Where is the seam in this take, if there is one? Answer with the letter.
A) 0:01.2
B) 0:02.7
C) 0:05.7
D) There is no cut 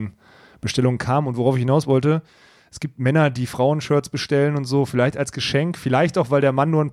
D